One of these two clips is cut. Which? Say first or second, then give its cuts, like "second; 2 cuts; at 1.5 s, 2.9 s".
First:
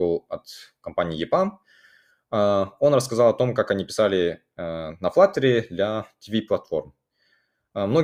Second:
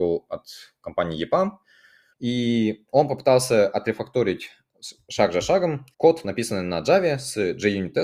second; 2 cuts; at 2.1 s, 5.9 s